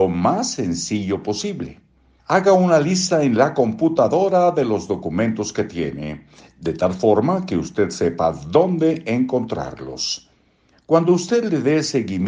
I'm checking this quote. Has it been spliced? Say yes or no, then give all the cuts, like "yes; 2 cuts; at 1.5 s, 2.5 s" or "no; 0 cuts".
yes; 2 cuts; at 2.2 s, 10.7 s